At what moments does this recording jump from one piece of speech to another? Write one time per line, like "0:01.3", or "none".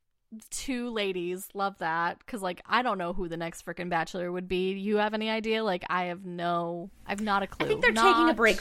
none